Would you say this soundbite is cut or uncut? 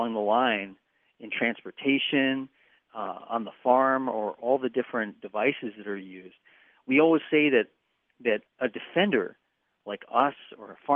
cut